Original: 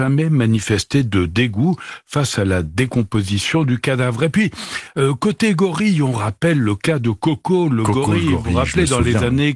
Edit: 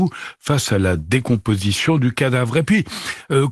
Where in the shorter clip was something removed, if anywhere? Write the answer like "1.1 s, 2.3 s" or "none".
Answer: none